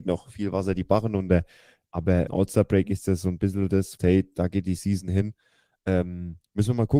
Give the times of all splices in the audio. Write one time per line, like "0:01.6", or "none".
0:02.3
0:04.0